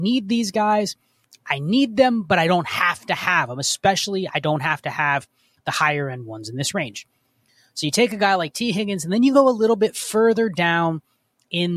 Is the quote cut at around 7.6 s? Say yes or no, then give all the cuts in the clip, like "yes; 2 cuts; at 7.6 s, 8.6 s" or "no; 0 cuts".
no; 1 cut; at 1.2 s